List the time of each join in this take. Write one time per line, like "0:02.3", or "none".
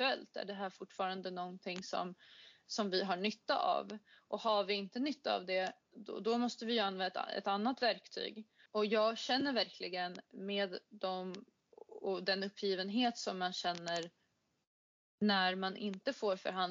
0:08.7